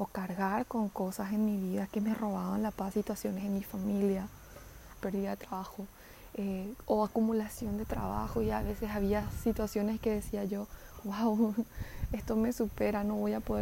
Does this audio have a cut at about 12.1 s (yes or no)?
no